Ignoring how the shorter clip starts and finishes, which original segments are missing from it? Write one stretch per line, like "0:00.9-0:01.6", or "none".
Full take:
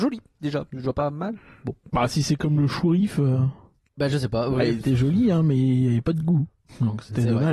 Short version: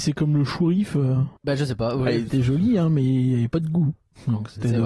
0:03.6-0:03.9